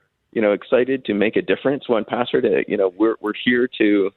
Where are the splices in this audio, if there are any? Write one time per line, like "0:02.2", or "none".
0:01.0